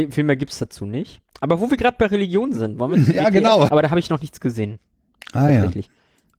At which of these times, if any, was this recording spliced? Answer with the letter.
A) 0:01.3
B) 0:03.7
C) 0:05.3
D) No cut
B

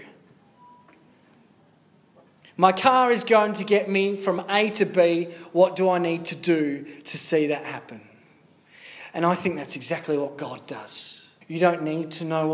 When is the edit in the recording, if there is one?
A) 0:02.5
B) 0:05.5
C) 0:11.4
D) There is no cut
C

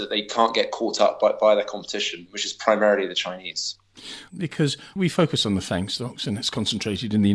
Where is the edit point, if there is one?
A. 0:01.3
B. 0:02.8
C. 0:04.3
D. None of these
C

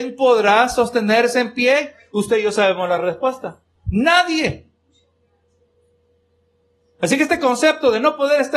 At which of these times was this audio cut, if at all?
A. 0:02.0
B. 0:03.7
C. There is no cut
C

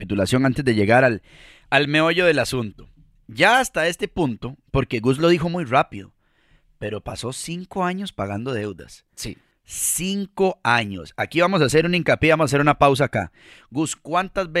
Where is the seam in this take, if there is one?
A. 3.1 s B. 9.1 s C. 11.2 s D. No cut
D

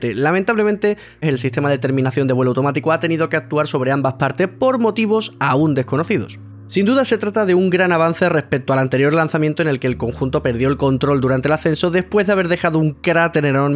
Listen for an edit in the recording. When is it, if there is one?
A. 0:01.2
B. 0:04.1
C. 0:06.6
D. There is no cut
A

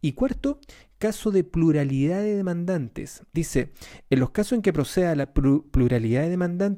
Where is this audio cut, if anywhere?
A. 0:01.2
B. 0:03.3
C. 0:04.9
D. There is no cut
B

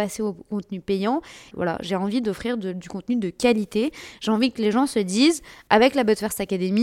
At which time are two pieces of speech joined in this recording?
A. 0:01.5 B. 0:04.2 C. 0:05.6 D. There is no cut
A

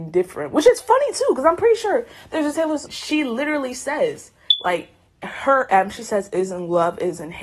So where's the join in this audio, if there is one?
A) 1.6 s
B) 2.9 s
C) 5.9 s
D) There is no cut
B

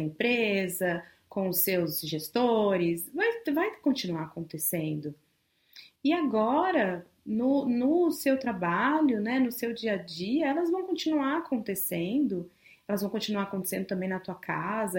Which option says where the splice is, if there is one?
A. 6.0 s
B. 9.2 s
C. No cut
A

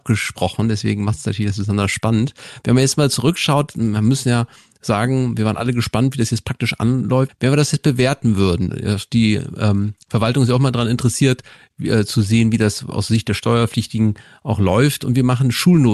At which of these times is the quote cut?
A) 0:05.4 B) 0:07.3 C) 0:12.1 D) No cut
B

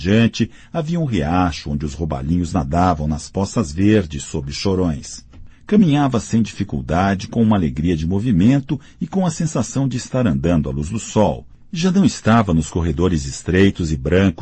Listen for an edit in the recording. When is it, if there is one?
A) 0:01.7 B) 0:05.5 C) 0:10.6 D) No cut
B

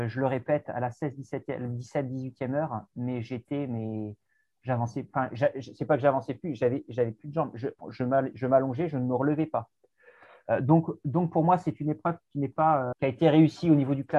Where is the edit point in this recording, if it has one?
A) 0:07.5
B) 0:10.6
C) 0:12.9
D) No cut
C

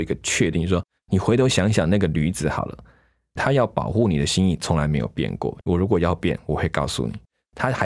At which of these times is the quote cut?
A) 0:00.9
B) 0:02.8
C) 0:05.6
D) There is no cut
C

